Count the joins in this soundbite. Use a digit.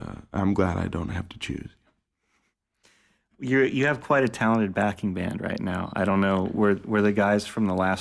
0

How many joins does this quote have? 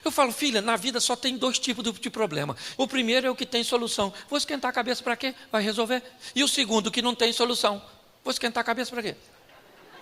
1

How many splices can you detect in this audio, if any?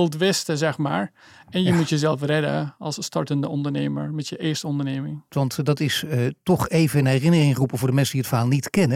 1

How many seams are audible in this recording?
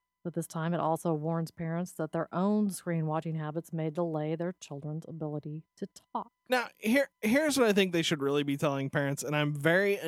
0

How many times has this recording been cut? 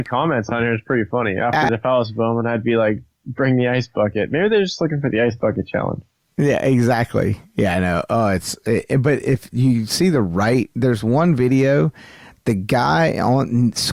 1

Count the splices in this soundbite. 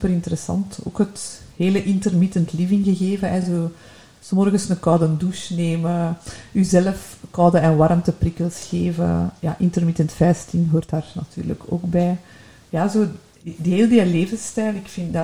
0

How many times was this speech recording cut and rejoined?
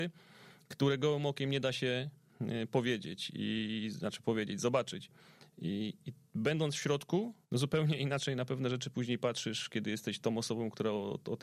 1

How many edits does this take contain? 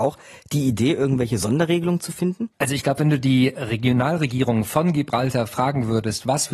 1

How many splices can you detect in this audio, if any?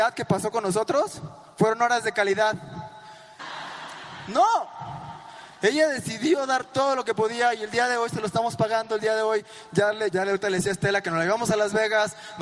2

